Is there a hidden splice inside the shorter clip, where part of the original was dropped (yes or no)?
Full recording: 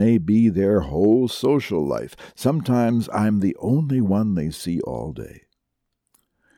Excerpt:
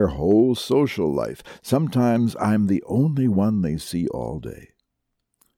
no